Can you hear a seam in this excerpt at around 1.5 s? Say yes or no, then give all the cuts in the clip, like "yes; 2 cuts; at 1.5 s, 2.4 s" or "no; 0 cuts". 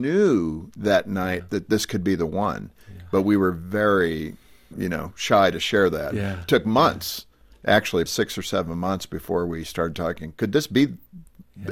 no; 2 cuts; at 4.7 s, 8.1 s